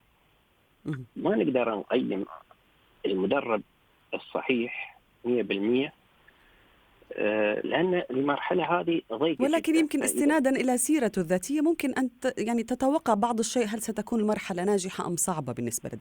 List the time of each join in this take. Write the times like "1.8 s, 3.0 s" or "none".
none